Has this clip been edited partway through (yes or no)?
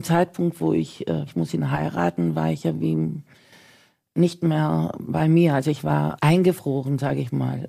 yes